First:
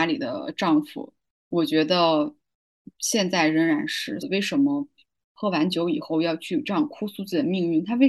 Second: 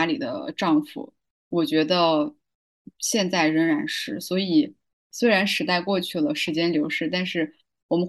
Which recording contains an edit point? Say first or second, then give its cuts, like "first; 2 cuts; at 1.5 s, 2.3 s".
first; 1 cut; at 4.2 s